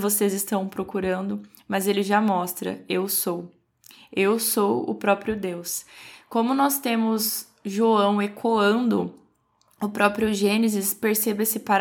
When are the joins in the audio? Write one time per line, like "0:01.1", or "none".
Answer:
none